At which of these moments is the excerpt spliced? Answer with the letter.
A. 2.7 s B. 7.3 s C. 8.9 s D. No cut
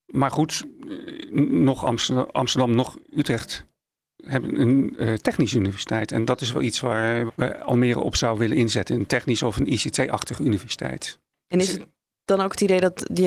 B